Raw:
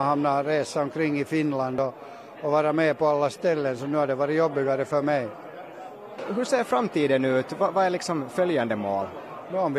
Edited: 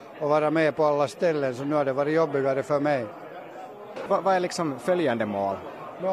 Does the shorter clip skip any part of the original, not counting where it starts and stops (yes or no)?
yes